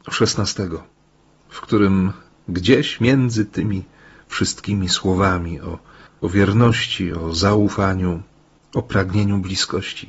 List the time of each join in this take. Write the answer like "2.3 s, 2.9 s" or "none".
none